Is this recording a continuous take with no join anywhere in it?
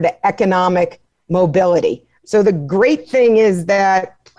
no; 1 cut; at 2.2 s

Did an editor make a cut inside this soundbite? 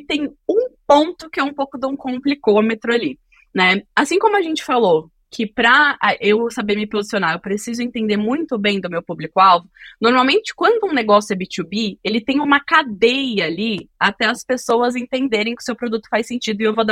no; 0 cuts

